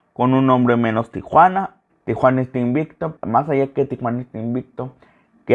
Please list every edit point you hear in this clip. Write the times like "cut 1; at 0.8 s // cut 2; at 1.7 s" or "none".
cut 1; at 1.9 s // cut 2; at 3.2 s